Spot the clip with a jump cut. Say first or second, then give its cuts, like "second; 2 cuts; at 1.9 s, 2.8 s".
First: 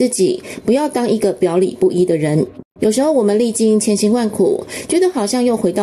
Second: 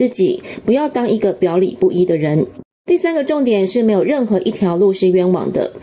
first; 1 cut; at 2.8 s